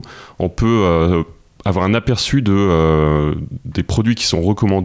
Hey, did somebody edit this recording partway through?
no; 0 cuts

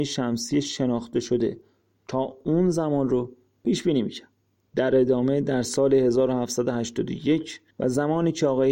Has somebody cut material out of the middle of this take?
yes; 1 cut; at 7.7 s

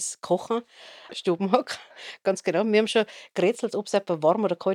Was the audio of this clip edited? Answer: yes; 1 cut; at 1.1 s

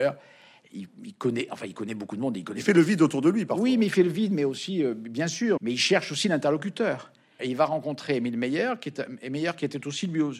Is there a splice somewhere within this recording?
yes; 2 cuts; at 5.6 s, 7.4 s

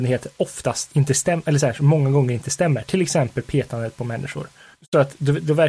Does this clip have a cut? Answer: no; 0 cuts

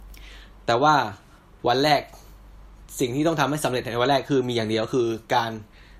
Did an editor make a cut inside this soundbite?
no; 0 cuts

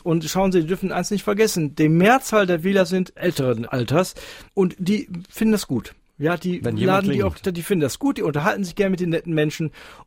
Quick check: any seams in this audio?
no; 0 cuts

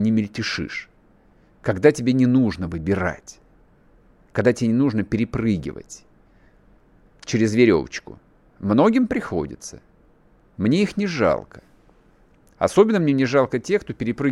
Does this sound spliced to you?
no; 0 cuts

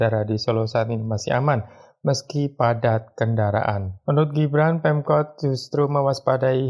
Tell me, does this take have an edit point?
no; 0 cuts

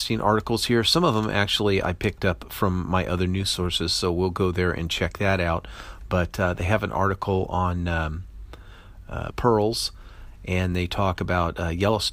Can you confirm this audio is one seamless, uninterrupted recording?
no; 1 cut; at 9.3 s

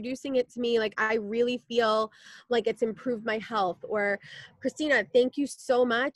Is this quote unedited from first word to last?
yes; 0 cuts

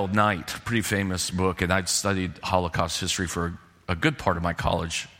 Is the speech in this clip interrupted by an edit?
no; 0 cuts

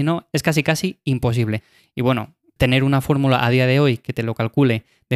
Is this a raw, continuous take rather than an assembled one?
yes; 0 cuts

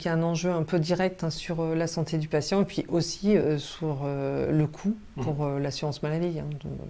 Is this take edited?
no; 0 cuts

